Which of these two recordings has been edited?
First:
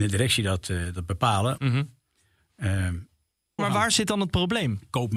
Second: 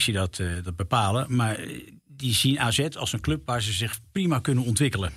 first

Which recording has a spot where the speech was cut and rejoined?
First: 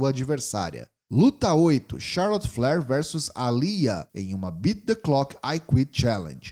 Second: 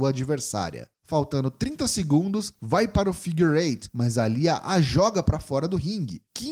second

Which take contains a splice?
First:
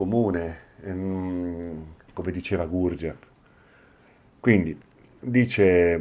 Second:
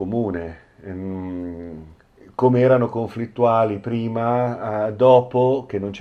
first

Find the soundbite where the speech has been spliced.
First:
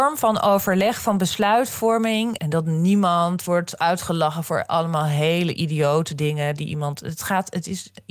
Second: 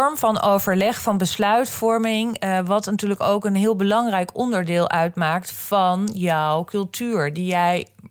first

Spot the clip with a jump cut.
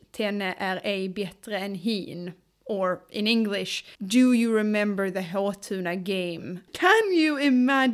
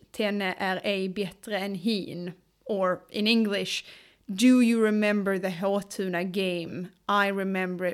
first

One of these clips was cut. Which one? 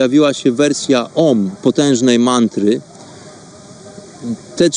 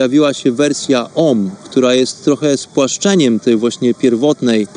first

